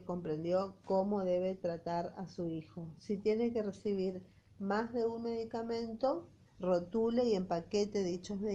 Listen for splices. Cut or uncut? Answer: cut